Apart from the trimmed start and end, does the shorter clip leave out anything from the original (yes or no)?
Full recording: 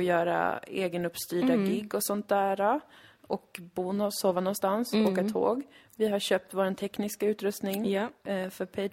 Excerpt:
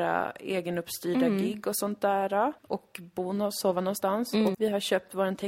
yes